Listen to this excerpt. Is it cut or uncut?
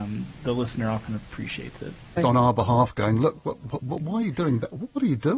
cut